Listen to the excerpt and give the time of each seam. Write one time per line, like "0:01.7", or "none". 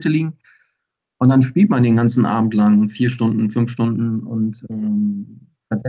none